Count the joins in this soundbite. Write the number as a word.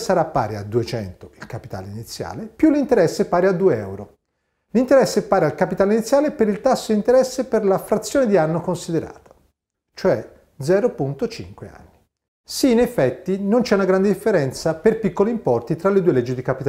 two